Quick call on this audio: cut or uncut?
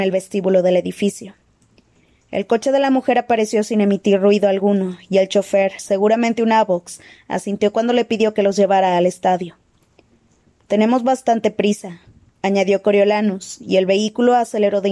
uncut